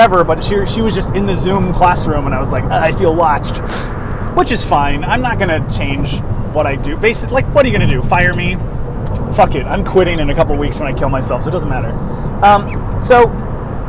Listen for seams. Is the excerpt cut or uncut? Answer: uncut